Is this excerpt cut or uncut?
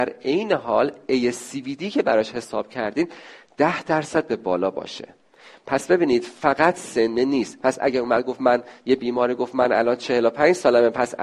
uncut